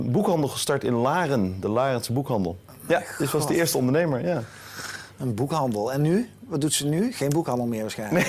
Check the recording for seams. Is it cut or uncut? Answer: uncut